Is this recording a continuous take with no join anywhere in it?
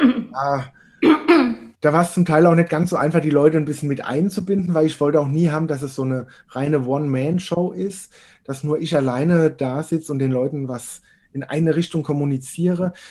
no; 1 cut; at 1.7 s

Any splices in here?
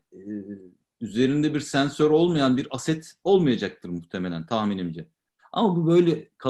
yes; 1 cut; at 5.4 s

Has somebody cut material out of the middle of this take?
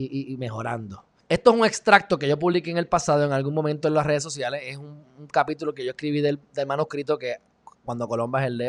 yes; 1 cut; at 1.2 s

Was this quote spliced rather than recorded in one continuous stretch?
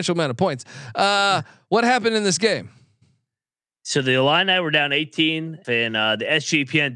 yes; 1 cut; at 5.6 s

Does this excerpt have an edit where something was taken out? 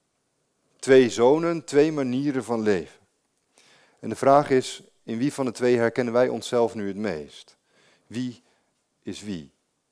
no; 0 cuts

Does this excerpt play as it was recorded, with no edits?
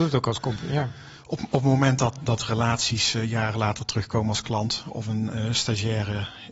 yes; 0 cuts

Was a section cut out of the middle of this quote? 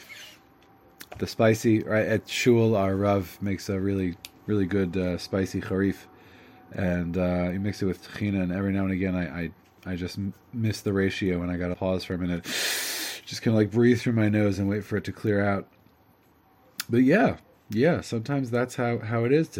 yes; 1 cut; at 11.7 s

